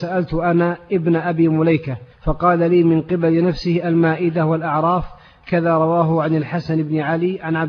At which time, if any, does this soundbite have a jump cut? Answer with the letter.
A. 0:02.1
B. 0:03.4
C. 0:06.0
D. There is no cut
A